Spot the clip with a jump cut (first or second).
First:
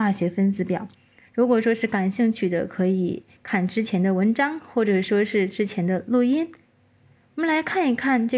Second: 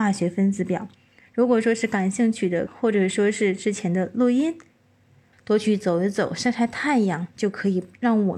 second